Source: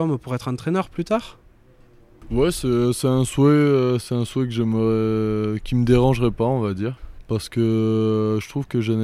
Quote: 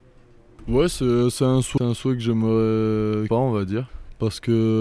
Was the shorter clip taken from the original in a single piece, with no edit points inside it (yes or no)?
no